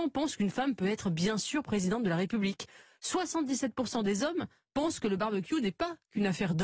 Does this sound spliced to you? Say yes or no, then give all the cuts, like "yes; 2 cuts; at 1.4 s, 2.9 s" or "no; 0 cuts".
no; 0 cuts